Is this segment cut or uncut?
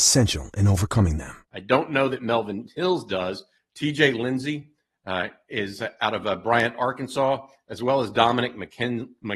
cut